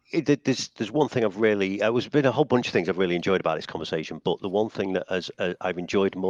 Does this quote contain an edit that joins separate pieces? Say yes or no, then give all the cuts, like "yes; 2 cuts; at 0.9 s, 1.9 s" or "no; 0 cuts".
no; 0 cuts